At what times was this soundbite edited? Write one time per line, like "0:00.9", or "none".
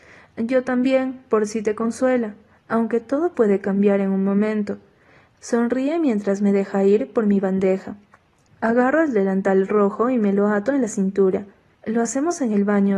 0:05.3
0:08.5
0:11.7